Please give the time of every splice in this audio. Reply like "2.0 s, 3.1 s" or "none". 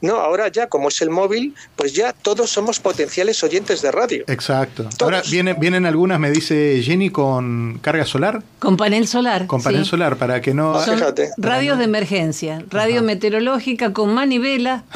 none